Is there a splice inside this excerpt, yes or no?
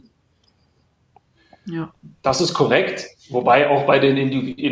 no